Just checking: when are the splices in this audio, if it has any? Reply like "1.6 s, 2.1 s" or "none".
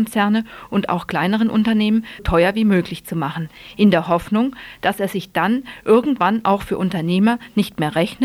2.2 s

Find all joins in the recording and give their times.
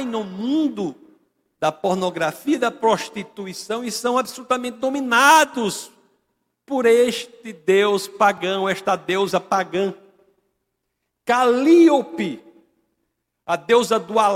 none

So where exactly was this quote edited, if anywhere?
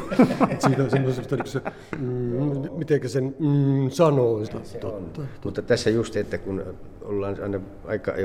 4.5 s

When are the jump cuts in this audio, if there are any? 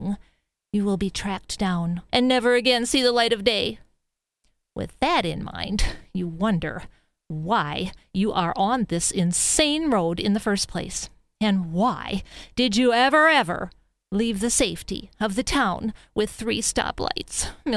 2.1 s

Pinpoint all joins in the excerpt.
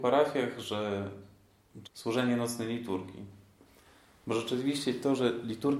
1.8 s

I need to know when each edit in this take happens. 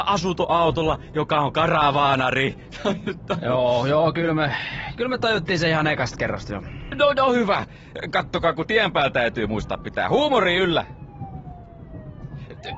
none

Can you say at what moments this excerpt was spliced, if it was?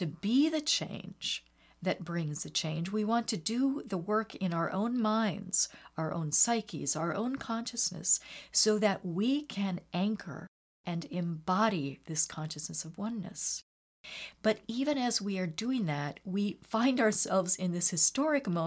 none

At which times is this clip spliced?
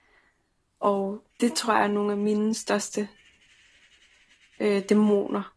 1.3 s

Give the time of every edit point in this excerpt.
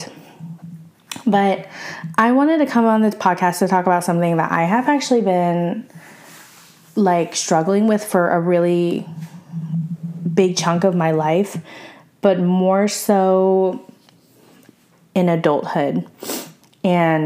none

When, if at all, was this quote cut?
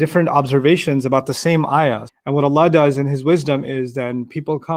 2.1 s

